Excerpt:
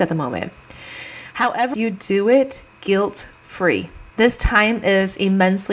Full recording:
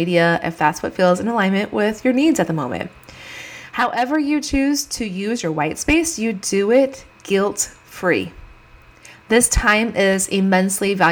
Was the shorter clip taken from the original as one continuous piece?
no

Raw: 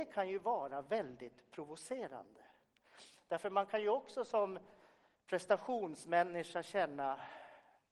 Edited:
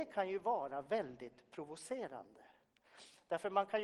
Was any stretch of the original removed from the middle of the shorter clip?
no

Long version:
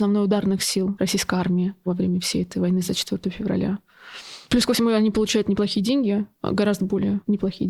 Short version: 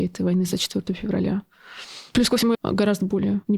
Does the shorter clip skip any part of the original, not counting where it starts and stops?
yes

